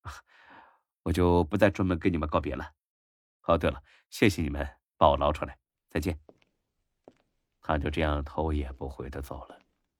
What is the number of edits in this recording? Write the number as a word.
zero